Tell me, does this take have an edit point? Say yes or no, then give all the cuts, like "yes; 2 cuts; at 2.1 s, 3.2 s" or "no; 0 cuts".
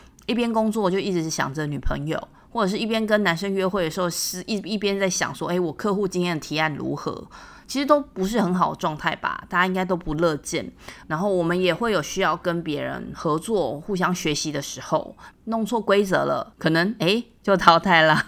yes; 3 cuts; at 11.0 s, 15.3 s, 16.5 s